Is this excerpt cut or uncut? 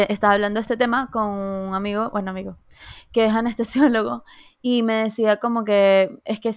uncut